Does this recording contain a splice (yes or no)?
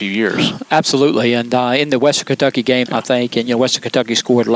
yes